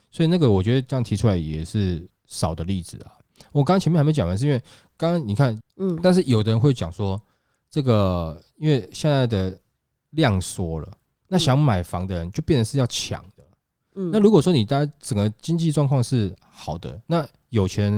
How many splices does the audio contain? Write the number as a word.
one